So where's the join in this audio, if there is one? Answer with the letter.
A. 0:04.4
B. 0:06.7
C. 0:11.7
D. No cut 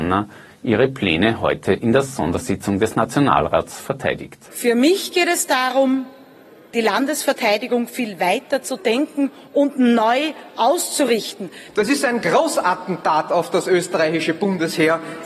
C